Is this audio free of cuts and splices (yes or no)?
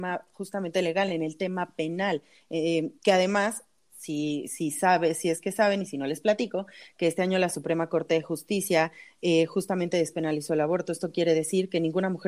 yes